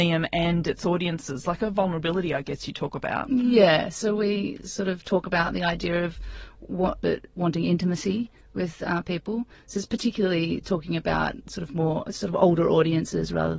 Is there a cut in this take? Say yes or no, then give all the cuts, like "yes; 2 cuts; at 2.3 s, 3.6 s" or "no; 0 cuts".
yes; 1 cut; at 7.0 s